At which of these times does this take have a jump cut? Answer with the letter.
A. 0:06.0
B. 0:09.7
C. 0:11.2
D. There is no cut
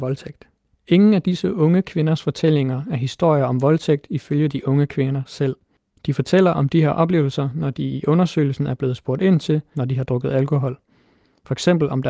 B